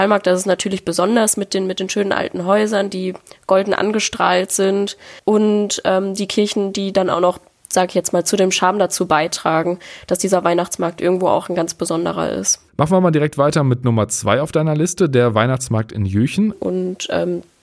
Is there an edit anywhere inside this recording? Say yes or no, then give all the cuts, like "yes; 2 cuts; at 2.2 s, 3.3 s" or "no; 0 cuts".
yes; 2 cuts; at 12.7 s, 16.5 s